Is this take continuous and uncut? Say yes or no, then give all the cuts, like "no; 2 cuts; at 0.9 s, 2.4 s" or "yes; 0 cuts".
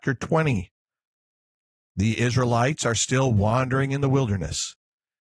yes; 0 cuts